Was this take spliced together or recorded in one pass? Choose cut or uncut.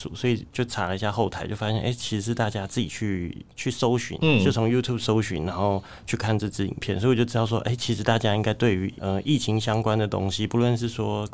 uncut